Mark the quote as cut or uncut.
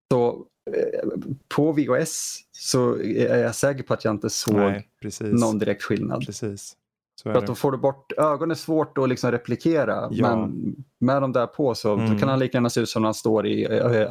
uncut